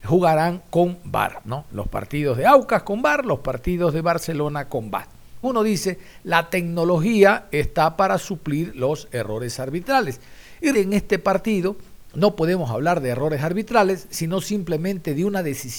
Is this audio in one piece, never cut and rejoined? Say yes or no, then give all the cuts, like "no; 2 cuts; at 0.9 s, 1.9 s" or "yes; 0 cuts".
no; 2 cuts; at 5.4 s, 10.7 s